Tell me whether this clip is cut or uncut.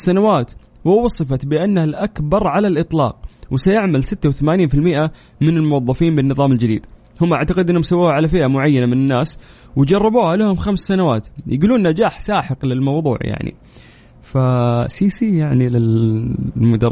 uncut